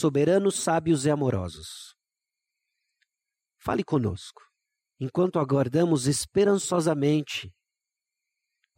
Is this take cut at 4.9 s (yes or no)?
yes